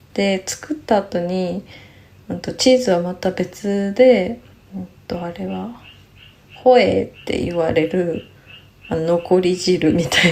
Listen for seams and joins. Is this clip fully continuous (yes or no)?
yes